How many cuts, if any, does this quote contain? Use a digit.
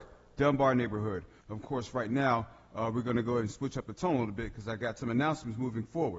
1